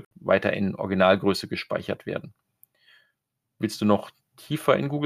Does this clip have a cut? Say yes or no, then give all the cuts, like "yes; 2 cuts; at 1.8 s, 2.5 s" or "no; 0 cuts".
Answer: no; 0 cuts